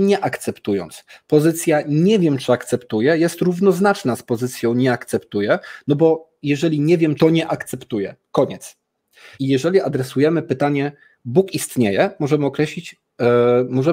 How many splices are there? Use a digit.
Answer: 2